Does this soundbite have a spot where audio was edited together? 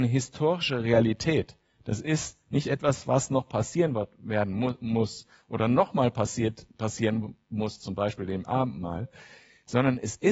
no; 0 cuts

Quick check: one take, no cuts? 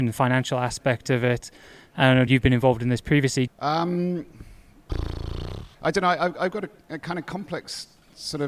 no; 3 cuts; at 2.3 s, 3.5 s, 5.7 s

